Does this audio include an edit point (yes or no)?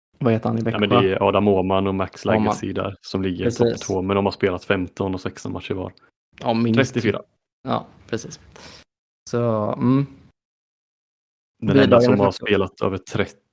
yes